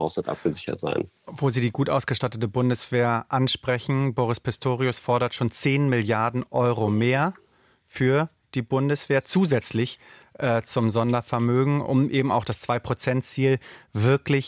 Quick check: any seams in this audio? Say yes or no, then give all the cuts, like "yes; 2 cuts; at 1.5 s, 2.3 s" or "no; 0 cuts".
no; 0 cuts